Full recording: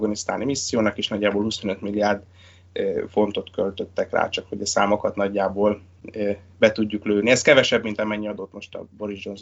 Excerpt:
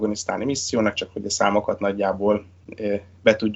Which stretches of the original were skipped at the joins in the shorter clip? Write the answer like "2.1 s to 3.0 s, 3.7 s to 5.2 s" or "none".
0.9 s to 4.3 s

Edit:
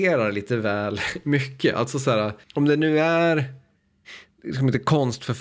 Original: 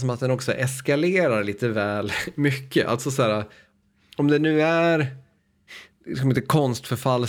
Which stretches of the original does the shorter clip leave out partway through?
3.6 s to 4.1 s

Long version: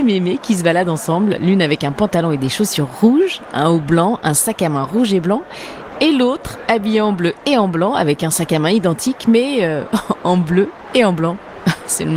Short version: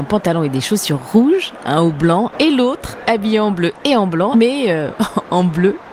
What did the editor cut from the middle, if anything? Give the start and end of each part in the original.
4.2 s to 5.9 s, 7.9 s to 9.2 s

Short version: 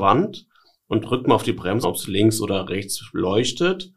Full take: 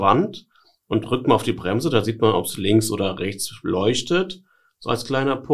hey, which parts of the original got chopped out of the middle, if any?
1.8 s to 2.3 s

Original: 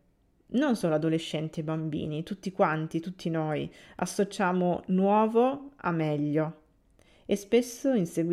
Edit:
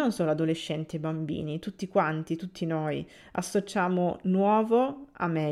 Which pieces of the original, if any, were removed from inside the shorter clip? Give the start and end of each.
none

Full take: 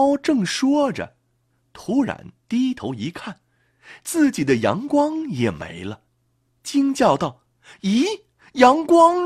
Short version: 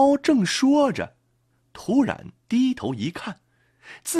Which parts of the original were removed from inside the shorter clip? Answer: none

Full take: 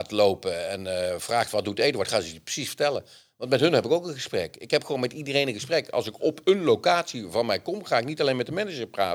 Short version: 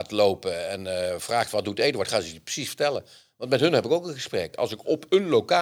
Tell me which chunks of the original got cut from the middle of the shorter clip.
4.5 s to 5.9 s

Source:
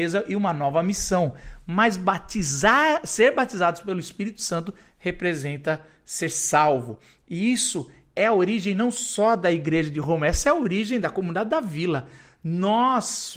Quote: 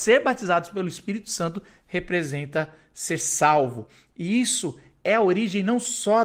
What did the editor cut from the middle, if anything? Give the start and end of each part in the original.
none

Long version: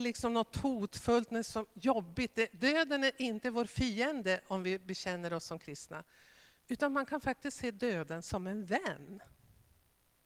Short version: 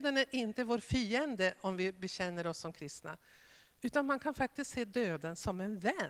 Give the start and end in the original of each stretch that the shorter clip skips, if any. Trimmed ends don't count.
none

